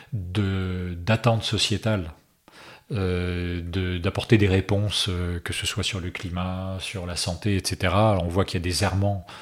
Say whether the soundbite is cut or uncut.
uncut